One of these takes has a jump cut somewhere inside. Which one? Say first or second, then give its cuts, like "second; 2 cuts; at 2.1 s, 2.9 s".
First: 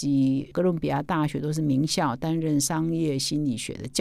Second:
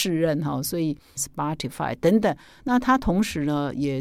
second; 1 cut; at 1.2 s